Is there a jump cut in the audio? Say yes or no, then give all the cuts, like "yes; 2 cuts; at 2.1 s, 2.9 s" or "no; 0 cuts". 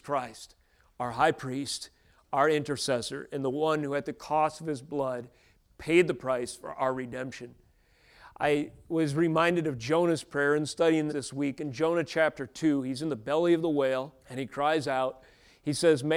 yes; 2 cuts; at 11.1 s, 14.2 s